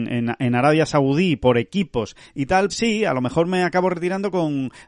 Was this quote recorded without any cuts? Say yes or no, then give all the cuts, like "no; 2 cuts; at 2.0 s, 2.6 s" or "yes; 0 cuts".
no; 1 cut; at 2.7 s